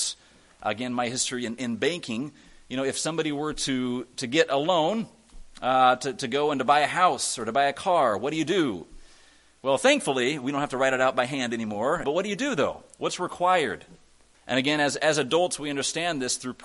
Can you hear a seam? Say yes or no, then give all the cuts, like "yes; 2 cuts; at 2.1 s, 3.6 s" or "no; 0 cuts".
yes; 2 cuts; at 12.0 s, 14.3 s